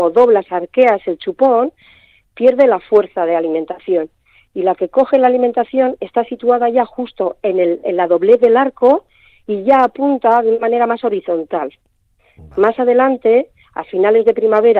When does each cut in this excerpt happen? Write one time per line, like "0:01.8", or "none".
none